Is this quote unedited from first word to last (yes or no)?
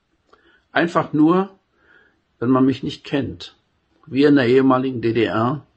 no